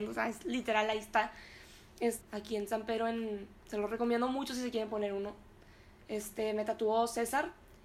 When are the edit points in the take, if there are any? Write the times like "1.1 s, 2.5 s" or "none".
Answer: 2.2 s, 3.6 s